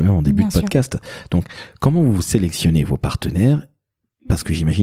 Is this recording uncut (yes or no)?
yes